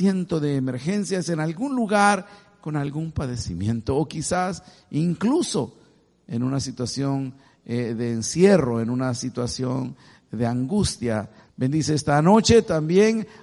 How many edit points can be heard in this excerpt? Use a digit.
1